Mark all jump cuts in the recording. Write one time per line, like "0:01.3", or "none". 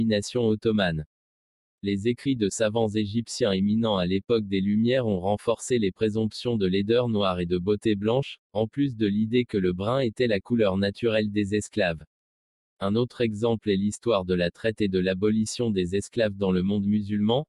0:01.7